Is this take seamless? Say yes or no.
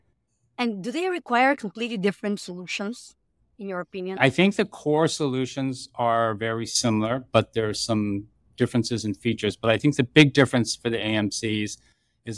yes